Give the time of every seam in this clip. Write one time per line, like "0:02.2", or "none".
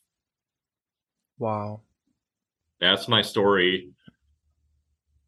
none